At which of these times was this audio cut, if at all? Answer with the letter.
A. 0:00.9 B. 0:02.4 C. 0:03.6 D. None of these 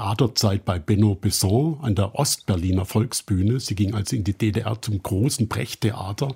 D